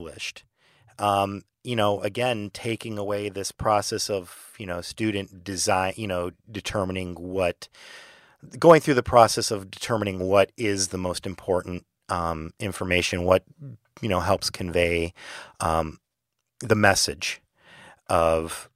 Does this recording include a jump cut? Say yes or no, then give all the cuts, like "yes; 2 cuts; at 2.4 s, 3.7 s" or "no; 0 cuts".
no; 0 cuts